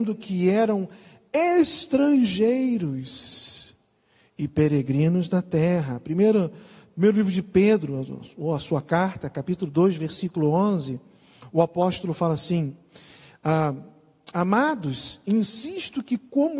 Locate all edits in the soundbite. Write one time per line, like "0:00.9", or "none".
none